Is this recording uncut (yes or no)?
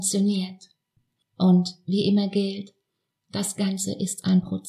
no